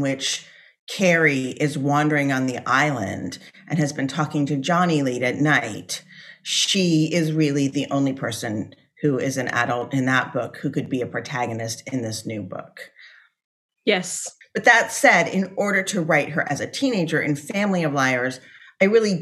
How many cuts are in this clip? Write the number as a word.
one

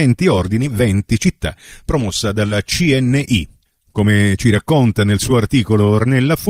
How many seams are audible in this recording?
one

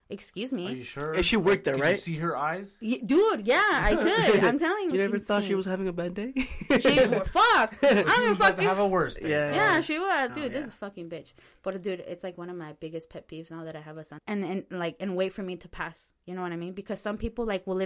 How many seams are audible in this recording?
three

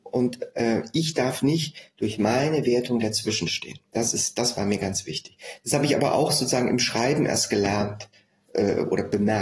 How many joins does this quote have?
one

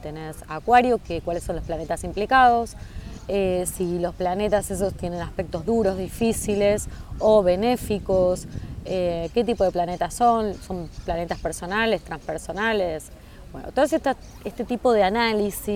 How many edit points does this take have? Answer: zero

